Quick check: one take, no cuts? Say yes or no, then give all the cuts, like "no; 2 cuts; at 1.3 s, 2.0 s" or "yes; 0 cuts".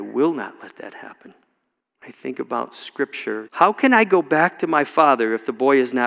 no; 2 cuts; at 1.8 s, 3.5 s